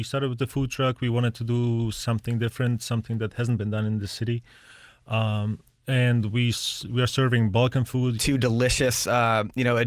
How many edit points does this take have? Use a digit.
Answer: 1